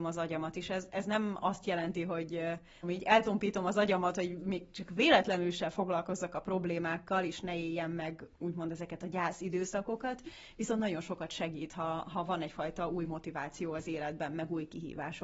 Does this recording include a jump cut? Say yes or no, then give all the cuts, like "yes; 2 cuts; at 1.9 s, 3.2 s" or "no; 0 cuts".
yes; 1 cut; at 2.8 s